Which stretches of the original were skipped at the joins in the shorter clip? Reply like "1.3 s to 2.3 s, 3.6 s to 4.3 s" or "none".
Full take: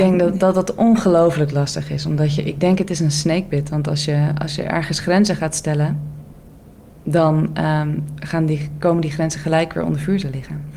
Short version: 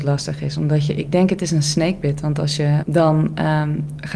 4.3 s to 7.0 s